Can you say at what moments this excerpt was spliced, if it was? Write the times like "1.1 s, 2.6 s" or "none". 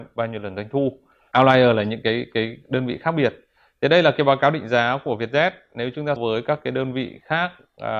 1.3 s, 6.2 s